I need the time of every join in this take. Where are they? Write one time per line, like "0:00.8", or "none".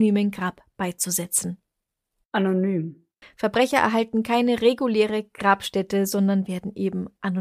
0:03.2